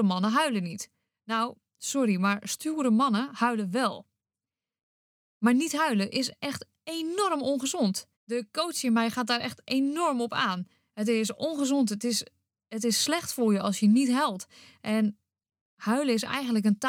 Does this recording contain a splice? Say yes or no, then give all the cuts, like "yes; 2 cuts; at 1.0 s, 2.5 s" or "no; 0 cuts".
yes; 2 cuts; at 5.2 s, 8.1 s